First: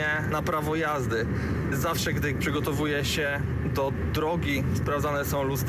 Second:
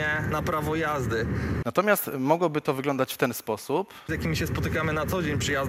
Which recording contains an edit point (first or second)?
second